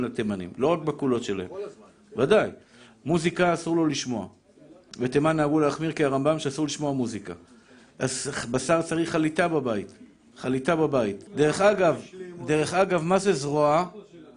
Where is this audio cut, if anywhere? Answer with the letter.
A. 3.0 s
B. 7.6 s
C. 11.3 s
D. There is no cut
C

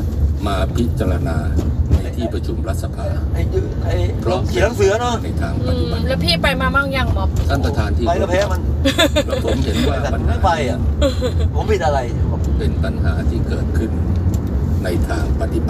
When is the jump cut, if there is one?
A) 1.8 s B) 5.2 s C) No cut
C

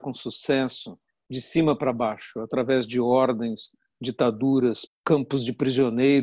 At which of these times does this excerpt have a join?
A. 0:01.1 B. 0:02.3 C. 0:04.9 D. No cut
C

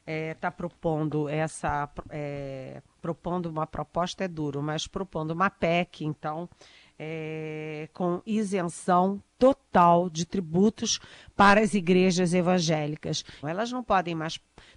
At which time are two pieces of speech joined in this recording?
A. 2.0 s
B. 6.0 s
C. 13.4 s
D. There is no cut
C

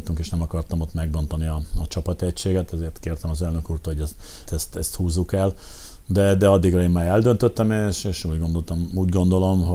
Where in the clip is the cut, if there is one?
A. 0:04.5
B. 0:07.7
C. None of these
A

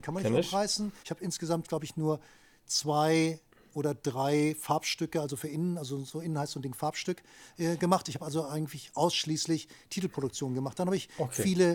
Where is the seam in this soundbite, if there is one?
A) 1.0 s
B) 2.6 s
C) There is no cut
A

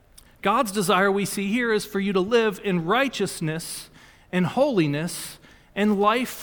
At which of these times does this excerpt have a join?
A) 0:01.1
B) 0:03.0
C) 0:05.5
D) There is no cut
D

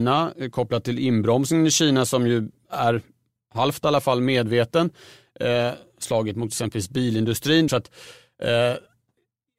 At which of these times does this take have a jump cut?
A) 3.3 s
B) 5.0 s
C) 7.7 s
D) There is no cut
C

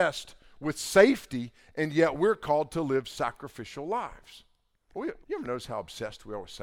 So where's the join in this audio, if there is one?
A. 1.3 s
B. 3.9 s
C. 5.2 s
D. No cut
C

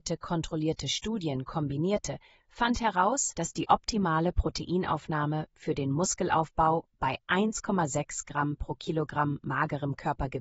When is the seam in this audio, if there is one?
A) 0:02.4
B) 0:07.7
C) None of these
C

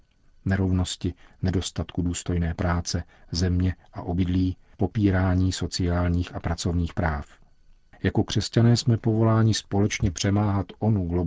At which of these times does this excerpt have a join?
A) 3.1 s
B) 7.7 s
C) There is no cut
C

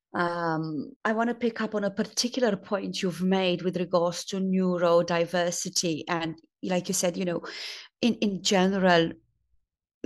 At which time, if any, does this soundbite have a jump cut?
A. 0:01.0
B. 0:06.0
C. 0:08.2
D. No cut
A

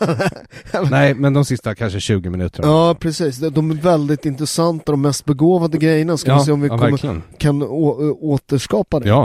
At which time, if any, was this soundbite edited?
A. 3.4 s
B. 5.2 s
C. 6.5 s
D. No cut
D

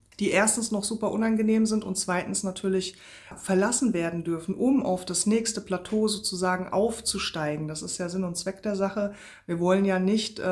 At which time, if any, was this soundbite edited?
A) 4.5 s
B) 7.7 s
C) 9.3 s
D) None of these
D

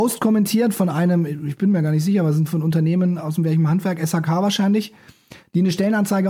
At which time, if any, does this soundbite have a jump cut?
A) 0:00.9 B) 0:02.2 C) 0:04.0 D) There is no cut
D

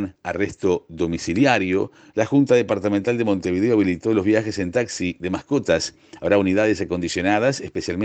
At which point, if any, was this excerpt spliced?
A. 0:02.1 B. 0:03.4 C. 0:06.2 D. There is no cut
A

